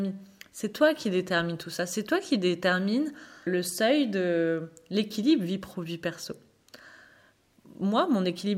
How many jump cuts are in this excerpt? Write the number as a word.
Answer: one